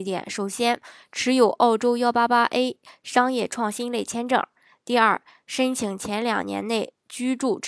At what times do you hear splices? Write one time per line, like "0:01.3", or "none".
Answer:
none